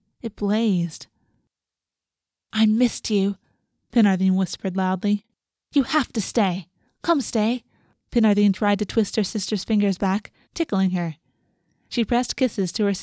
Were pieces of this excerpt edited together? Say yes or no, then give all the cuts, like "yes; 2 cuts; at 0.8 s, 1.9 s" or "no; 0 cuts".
yes; 2 cuts; at 7.9 s, 10.4 s